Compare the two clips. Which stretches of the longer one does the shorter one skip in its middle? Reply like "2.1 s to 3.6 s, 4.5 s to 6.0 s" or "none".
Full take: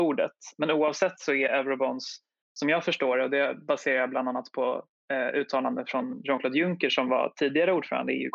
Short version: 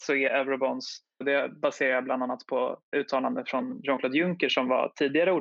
2.4 s to 3.3 s, 5.0 s to 5.3 s